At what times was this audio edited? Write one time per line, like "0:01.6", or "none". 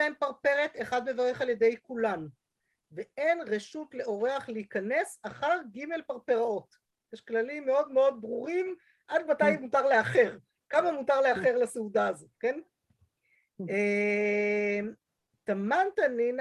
none